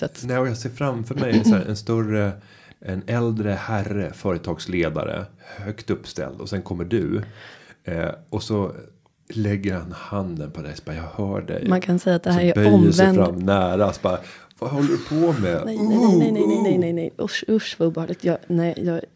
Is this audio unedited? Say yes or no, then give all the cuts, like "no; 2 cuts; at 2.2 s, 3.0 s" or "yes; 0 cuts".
yes; 0 cuts